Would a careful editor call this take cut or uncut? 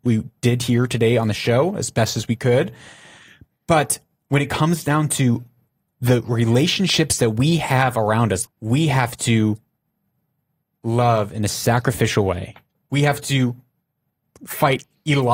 cut